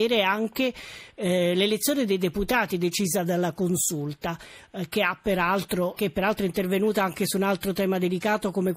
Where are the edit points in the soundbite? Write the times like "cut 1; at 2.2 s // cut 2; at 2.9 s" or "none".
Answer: cut 1; at 6.0 s